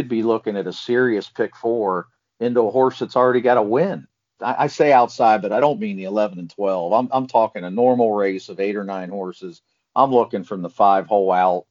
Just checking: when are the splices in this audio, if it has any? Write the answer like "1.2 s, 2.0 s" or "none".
4.4 s